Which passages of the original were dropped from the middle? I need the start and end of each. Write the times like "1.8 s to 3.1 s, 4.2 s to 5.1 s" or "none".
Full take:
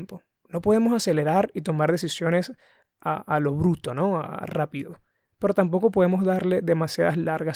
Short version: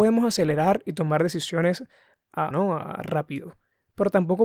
3.2 s to 3.9 s